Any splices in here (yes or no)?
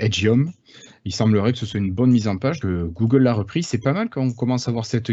yes